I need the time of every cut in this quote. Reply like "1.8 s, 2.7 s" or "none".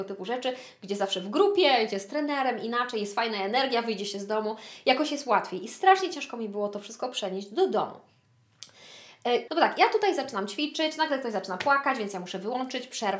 9.5 s